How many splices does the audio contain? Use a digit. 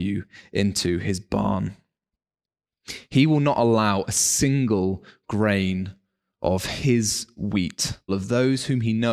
1